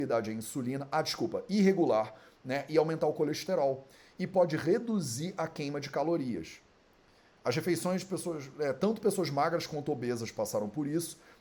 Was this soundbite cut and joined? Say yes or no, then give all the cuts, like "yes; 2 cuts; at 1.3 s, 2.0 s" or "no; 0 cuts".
no; 0 cuts